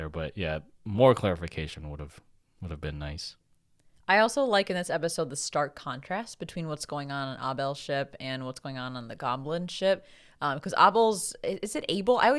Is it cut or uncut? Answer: uncut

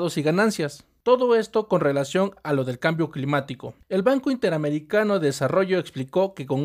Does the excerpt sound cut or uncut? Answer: cut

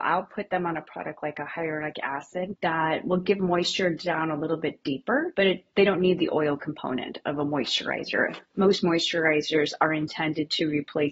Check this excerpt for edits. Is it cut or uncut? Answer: uncut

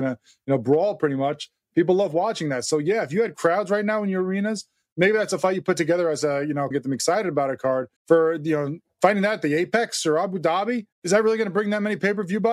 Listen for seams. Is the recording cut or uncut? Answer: cut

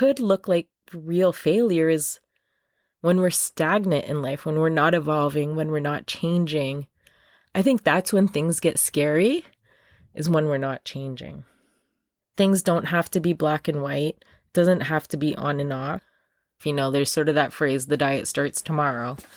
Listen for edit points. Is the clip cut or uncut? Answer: cut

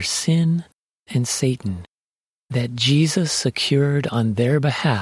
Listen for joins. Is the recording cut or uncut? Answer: cut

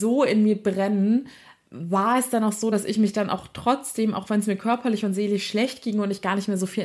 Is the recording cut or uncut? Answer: uncut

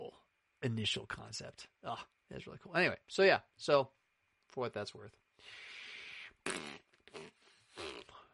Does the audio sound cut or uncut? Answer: uncut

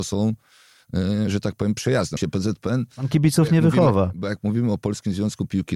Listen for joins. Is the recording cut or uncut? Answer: cut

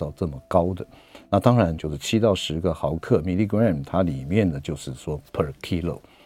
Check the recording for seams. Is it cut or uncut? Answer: cut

